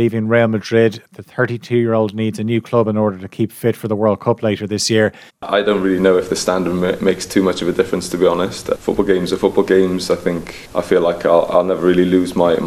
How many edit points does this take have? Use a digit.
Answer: 1